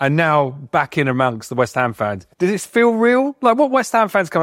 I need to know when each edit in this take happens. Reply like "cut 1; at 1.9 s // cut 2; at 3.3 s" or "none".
cut 1; at 2.3 s